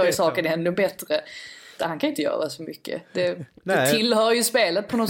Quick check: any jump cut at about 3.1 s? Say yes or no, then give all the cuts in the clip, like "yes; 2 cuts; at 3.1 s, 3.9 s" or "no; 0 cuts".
no; 1 cut; at 1.8 s